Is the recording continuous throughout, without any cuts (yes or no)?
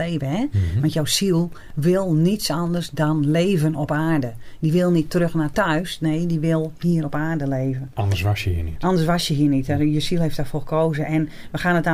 yes